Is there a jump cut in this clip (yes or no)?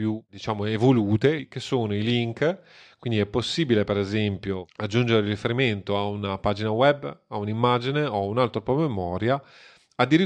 no